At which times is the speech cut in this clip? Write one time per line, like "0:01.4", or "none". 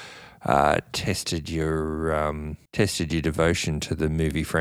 0:02.7